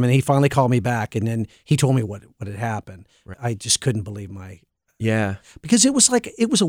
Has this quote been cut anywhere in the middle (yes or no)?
yes